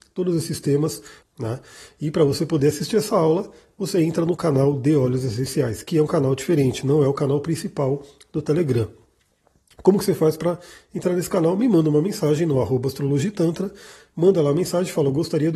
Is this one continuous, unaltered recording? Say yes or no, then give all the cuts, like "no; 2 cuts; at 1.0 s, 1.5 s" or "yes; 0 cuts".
no; 1 cut; at 1.2 s